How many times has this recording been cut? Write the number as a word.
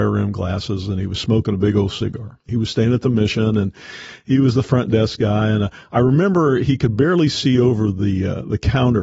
one